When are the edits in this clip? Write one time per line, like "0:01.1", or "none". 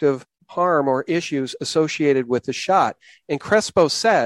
none